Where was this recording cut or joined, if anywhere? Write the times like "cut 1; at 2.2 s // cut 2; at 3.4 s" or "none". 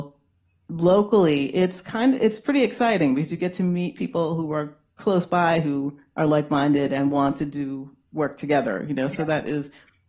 none